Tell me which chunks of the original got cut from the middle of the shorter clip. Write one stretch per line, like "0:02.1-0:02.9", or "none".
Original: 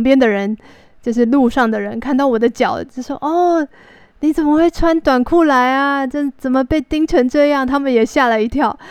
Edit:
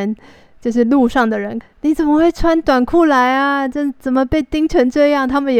0:02.0-0:04.0